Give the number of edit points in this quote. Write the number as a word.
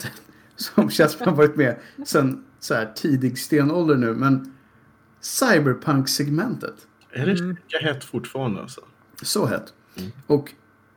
zero